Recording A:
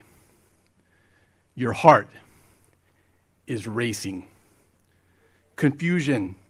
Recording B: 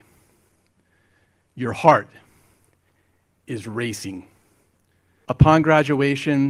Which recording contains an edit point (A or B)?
B